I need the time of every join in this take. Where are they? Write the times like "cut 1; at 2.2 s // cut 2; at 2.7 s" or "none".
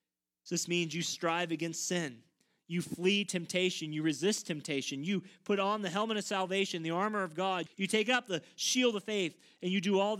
cut 1; at 7.7 s